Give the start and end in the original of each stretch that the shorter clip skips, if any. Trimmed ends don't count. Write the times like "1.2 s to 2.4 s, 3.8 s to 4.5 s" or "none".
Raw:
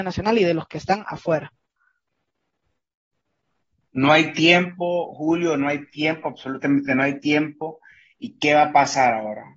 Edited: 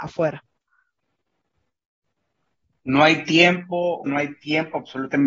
5.1 s to 5.6 s